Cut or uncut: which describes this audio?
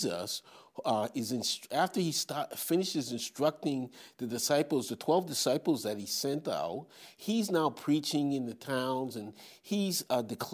uncut